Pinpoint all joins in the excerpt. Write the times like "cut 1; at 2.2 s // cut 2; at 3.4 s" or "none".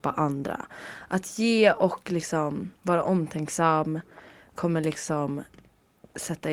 cut 1; at 2.8 s